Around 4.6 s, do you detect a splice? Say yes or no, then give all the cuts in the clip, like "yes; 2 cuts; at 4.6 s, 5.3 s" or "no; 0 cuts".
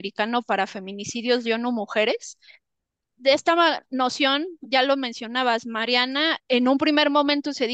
no; 2 cuts; at 3.1 s, 6.4 s